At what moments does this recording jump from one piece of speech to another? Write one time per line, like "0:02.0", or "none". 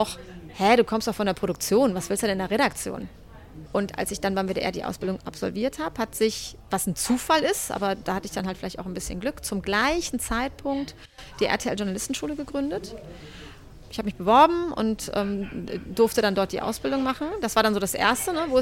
0:03.7